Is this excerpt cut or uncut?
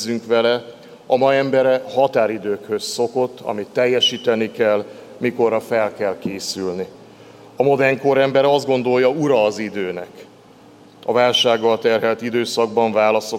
uncut